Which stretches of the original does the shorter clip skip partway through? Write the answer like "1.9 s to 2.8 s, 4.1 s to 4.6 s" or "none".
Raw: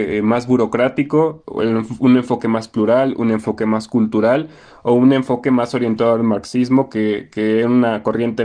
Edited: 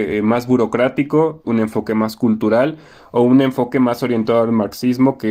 1.4 s to 3.2 s